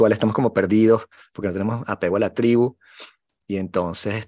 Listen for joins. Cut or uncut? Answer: uncut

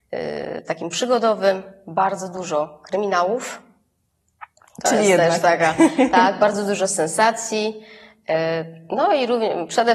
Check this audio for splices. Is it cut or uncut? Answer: uncut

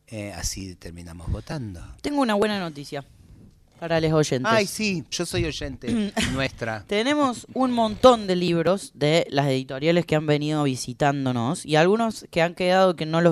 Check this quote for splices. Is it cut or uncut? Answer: cut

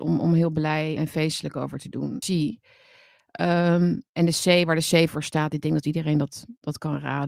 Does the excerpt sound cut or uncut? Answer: cut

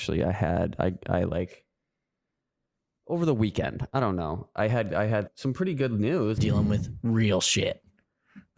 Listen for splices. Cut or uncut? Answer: cut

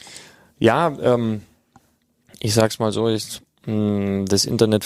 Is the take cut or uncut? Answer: uncut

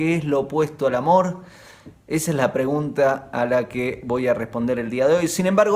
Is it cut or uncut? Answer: uncut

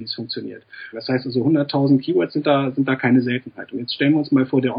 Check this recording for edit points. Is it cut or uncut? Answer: cut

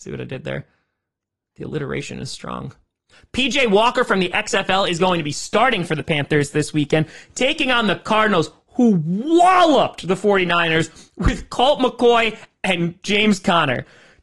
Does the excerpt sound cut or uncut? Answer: uncut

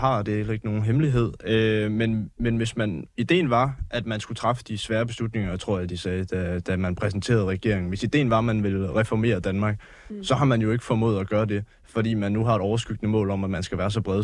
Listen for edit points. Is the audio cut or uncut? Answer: uncut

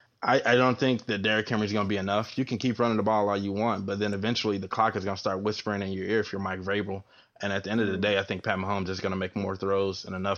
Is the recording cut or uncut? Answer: uncut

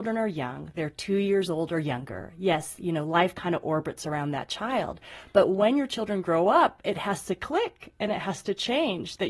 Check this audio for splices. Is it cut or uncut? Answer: uncut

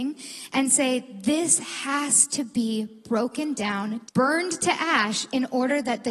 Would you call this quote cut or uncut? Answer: cut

